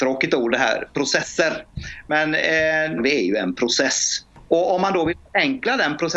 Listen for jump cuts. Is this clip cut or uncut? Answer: cut